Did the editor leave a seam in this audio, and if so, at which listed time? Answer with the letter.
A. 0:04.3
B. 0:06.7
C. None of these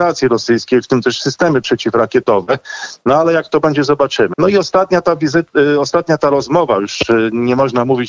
A